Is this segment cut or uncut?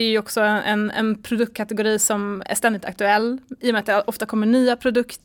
uncut